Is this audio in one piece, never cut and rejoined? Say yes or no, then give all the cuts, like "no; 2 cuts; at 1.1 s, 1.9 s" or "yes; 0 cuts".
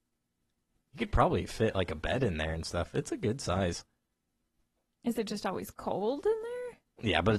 yes; 0 cuts